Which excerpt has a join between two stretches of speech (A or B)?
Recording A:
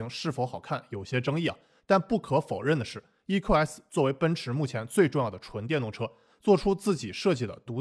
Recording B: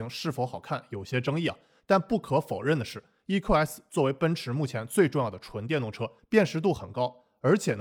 B